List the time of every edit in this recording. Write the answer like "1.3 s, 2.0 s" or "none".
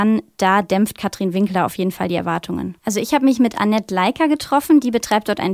2.8 s